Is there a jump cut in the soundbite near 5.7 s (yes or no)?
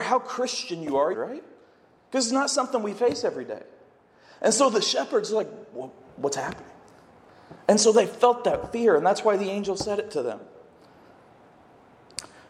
no